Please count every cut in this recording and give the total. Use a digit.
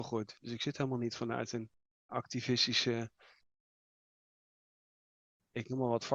1